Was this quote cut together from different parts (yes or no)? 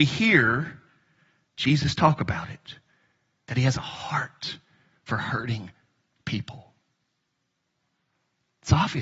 no